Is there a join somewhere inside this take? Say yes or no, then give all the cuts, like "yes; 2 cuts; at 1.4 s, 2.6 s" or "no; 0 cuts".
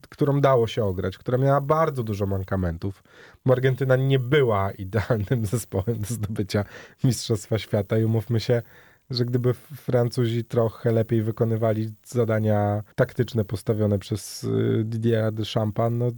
yes; 1 cut; at 12.9 s